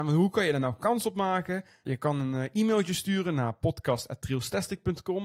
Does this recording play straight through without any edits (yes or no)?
yes